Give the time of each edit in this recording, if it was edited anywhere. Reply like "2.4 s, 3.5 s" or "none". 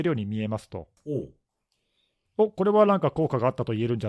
none